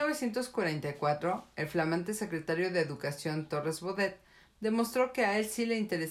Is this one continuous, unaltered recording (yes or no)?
yes